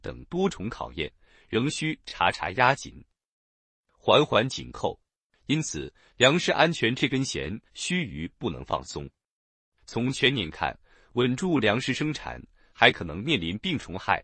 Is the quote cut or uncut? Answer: cut